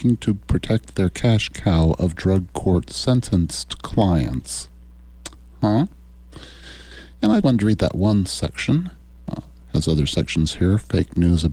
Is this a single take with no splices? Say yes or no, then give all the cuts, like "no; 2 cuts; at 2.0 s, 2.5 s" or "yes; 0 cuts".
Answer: no; 1 cut; at 7.4 s